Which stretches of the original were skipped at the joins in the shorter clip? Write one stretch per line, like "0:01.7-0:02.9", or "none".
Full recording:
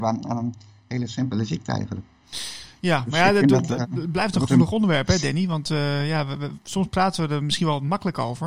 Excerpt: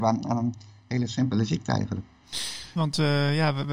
0:02.8-0:05.5